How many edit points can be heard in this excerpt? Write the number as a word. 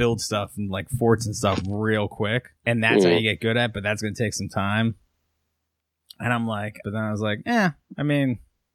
two